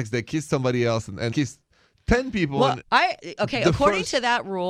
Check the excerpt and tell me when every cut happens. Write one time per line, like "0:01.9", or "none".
0:01.3
0:02.8